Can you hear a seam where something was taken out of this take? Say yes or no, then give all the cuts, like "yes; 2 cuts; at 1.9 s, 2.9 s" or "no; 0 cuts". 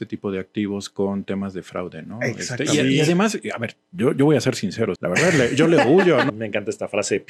yes; 2 cuts; at 5.0 s, 6.3 s